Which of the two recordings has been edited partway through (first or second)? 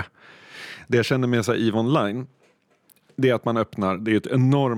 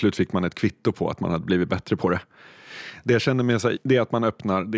second